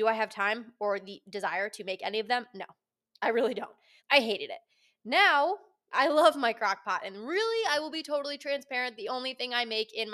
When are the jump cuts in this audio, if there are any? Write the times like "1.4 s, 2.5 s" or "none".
4.0 s, 5.9 s